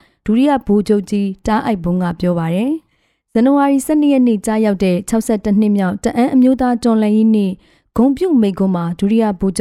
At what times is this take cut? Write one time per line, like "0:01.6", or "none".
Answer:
none

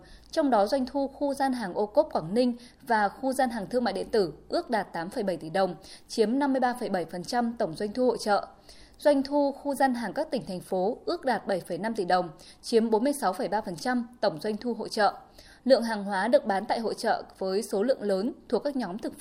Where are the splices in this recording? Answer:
none

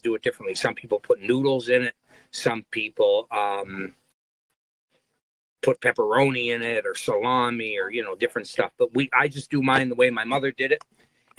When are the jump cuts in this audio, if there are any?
none

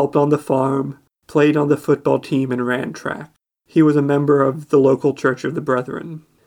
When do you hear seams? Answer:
0:01.2

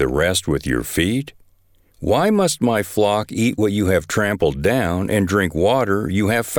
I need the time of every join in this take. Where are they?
none

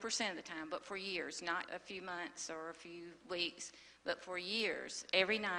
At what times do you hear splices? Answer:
0:01.7

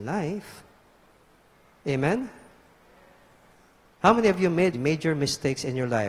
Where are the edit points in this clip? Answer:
0:04.7

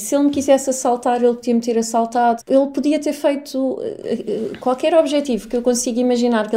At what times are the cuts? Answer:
0:02.4

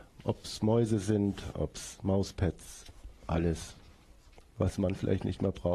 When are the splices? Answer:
0:01.5

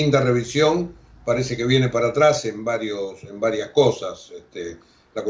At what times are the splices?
none

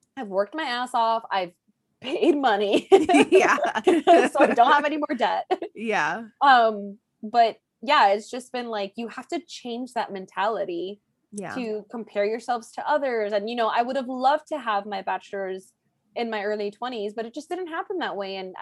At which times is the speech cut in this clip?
0:03.8

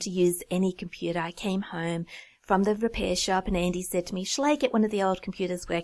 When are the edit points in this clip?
none

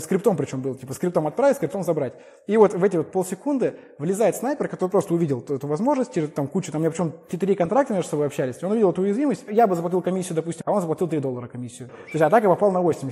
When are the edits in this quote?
0:09.5
0:10.6
0:11.9

